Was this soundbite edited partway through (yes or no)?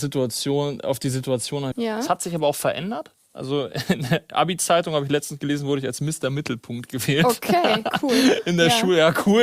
yes